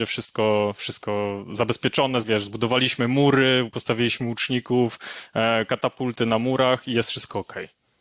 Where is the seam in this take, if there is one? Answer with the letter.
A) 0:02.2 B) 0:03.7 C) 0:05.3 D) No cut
A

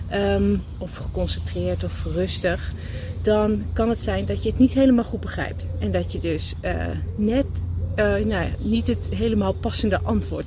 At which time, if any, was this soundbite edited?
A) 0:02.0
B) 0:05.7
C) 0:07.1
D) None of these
D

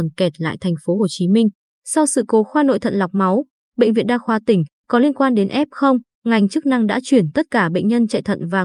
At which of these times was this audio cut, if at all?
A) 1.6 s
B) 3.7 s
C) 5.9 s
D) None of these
A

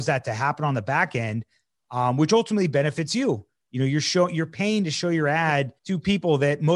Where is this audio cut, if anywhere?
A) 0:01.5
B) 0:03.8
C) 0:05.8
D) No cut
C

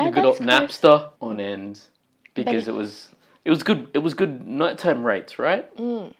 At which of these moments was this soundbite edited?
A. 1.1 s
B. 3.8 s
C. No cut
A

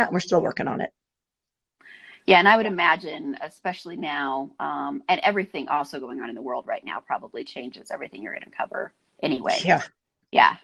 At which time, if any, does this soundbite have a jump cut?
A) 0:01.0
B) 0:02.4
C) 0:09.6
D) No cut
D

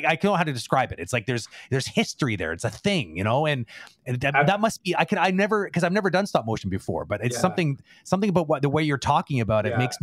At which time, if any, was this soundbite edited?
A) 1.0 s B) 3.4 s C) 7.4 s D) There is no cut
D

